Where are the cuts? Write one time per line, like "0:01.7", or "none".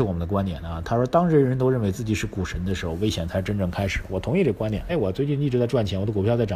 0:04.9